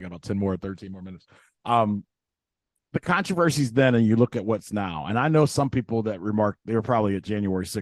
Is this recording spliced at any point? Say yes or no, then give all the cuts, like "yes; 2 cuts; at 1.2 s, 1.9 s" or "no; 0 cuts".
yes; 1 cut; at 2.8 s